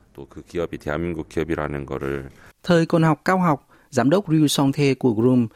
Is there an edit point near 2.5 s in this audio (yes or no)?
yes